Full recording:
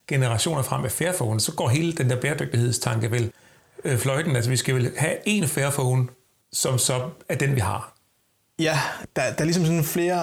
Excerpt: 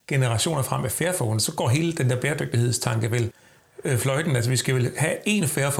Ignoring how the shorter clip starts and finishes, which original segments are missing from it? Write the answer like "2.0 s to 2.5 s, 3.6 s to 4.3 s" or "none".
none